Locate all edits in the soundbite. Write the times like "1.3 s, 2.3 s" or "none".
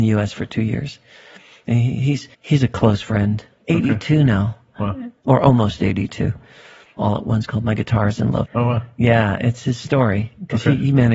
2.3 s, 7.0 s, 8.5 s